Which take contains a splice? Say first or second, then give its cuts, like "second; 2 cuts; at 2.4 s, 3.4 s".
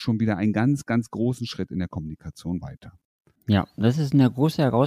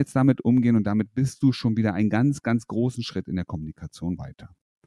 first; 1 cut; at 3.4 s